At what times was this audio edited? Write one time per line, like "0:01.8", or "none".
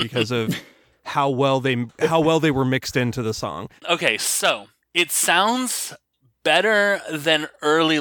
0:03.8